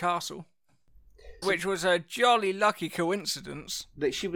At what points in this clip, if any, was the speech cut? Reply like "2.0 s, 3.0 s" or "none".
1.4 s